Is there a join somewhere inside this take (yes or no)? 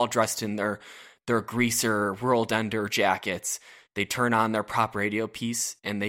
no